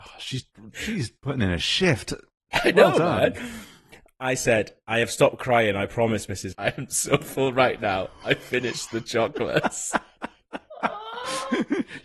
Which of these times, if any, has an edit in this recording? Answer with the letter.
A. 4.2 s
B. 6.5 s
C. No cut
B